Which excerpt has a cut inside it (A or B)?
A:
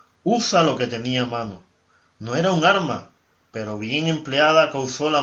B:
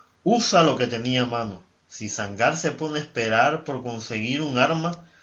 B